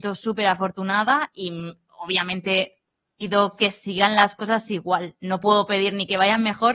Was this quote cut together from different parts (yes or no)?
no